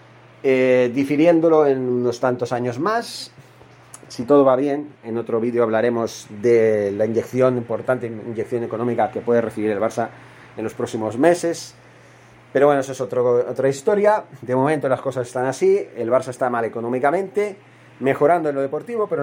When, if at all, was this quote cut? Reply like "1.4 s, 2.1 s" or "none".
none